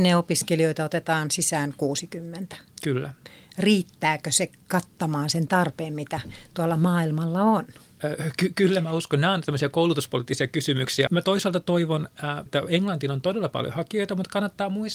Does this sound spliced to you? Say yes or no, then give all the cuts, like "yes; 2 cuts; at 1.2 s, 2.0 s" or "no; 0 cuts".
yes; 2 cuts; at 11.1 s, 12.5 s